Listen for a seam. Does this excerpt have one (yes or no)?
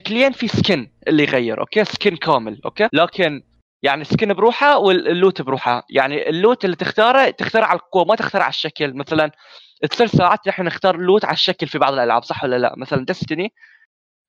yes